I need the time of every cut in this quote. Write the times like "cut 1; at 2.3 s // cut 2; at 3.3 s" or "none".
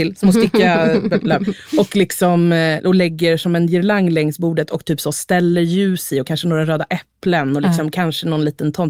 none